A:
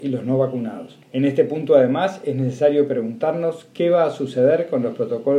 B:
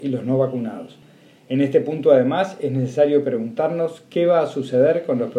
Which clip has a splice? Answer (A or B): A